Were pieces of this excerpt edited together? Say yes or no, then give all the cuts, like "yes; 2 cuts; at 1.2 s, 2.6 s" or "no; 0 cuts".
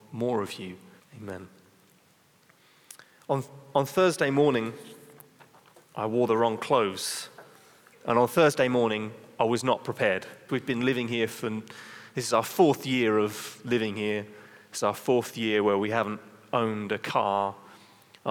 yes; 3 cuts; at 1.0 s, 7.9 s, 10.5 s